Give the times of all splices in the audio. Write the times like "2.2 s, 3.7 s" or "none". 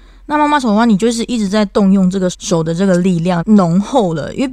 2.3 s, 3.4 s